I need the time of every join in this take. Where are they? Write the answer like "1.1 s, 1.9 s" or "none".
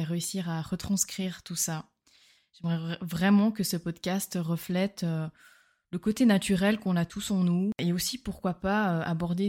none